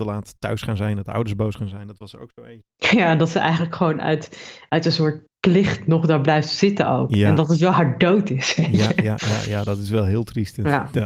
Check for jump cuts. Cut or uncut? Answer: uncut